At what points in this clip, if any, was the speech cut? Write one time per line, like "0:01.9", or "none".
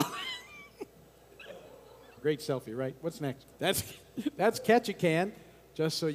0:02.2
0:03.5

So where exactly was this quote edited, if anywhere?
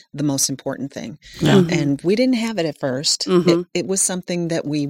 none

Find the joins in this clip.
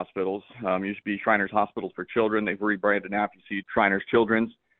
0:03.6

